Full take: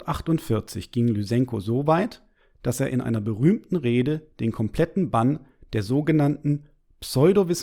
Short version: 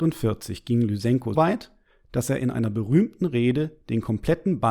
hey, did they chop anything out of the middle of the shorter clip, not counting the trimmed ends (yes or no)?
yes